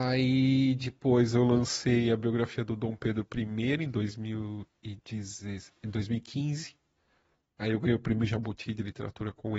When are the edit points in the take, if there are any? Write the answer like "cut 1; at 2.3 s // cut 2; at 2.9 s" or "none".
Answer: none

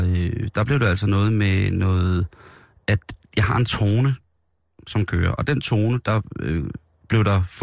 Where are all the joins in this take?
none

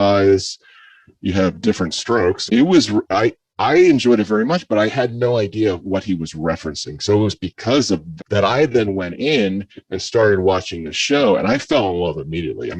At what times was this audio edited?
cut 1; at 2.5 s // cut 2; at 8.2 s

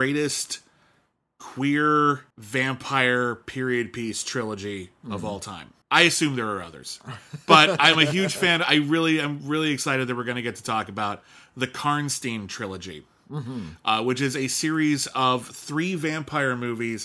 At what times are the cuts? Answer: cut 1; at 2.3 s // cut 2; at 5.8 s

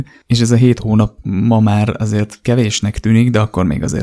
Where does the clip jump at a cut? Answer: cut 1; at 1.2 s

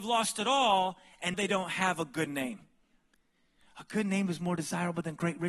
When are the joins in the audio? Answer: cut 1; at 1.3 s

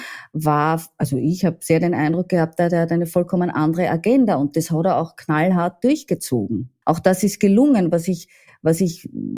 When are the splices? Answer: cut 1; at 6.8 s

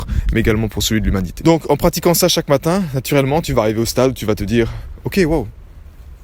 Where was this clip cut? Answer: cut 1; at 1.4 s

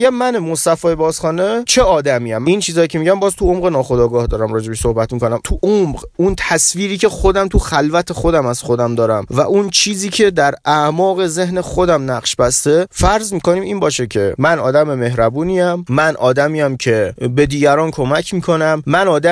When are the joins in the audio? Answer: cut 1; at 2.4 s

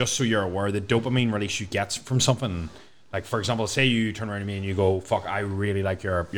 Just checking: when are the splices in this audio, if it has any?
none

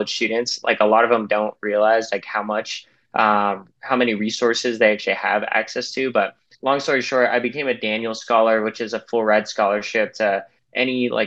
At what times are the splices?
cut 1; at 6.5 s

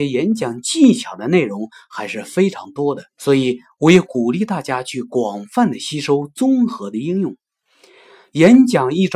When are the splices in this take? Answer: cut 1; at 3.1 s

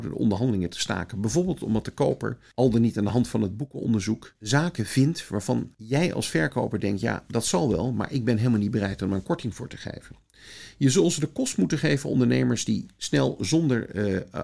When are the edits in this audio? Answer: none

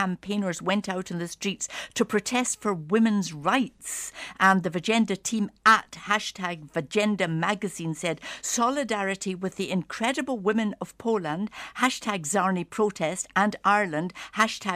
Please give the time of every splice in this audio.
none

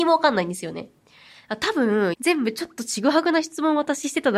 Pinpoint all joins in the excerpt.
cut 1; at 2.1 s

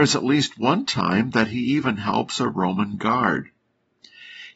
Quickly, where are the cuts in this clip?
none

